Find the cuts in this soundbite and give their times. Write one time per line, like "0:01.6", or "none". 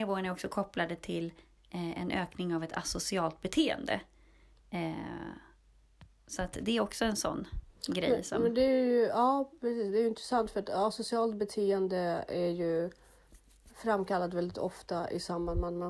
none